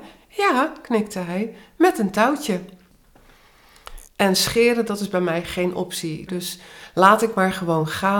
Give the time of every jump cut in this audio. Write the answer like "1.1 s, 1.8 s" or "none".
4.1 s, 6.3 s